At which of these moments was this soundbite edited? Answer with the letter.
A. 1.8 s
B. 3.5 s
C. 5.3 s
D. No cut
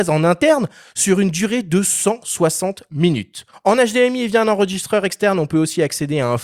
B